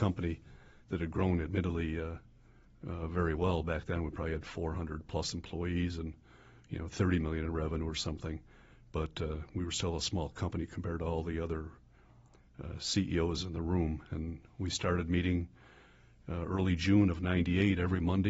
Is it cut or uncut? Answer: uncut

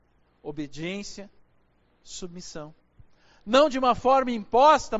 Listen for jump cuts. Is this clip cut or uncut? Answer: uncut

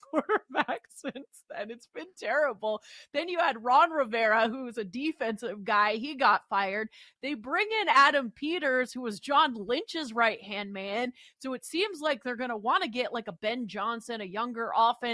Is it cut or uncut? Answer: uncut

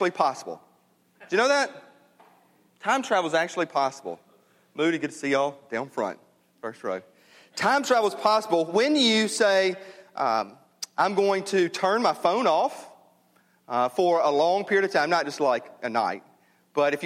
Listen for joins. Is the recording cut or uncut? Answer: uncut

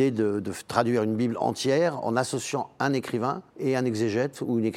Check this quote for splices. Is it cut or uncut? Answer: cut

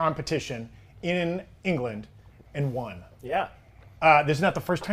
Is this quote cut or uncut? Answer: uncut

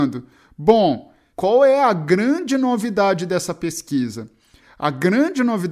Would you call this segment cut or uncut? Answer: cut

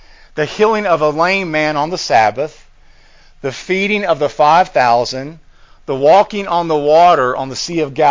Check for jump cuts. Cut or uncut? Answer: uncut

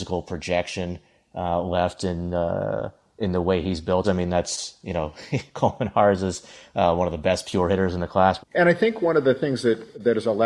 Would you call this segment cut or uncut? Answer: cut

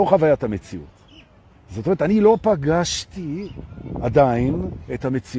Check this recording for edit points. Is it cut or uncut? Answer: uncut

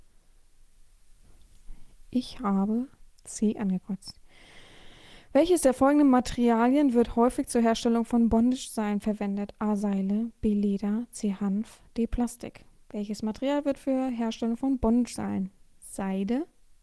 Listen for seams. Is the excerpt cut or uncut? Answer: uncut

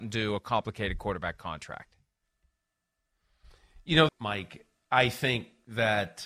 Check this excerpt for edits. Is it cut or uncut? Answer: cut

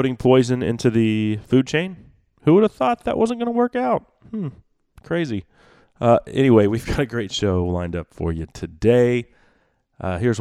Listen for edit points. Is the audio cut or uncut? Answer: uncut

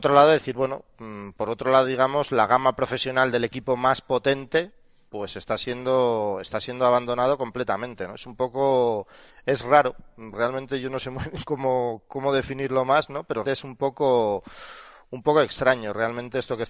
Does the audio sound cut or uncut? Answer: cut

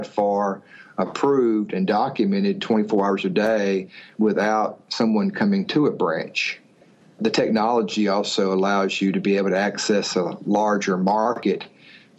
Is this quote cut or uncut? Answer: uncut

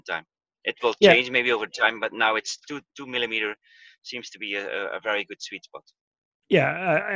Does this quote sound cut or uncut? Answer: uncut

